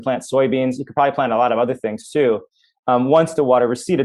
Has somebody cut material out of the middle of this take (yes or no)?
no